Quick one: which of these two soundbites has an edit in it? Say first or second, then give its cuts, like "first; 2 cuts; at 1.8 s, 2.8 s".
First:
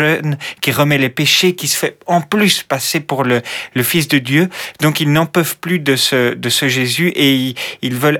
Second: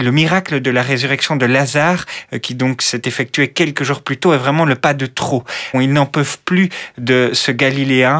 second; 1 cut; at 5.7 s